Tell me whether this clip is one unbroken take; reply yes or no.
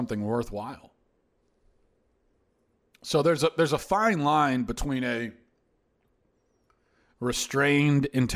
yes